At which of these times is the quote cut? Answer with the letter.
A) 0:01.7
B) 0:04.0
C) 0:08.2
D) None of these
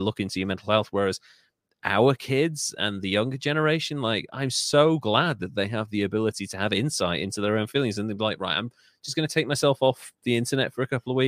D